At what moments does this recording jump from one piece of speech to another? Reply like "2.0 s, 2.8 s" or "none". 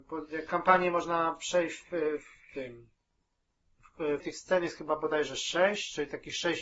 1.8 s, 4.2 s